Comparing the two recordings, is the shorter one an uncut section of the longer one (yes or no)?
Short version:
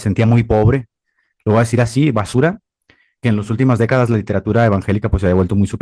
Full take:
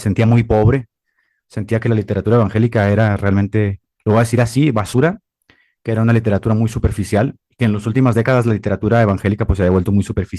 no